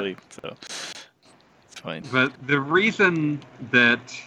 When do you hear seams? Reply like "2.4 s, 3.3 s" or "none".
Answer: 2.4 s